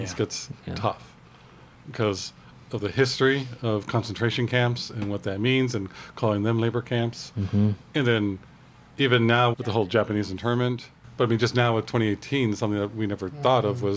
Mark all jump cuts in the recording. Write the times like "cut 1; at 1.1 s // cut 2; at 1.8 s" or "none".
cut 1; at 9.5 s